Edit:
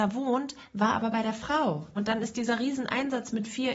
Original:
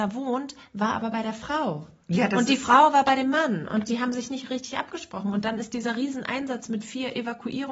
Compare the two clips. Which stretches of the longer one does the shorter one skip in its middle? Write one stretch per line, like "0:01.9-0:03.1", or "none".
0:02.0-0:05.3